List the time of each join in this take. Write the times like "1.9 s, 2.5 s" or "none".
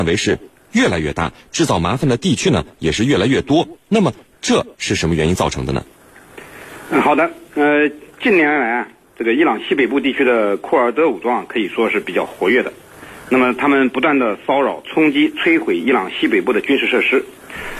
none